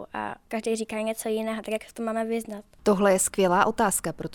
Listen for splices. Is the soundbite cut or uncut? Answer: cut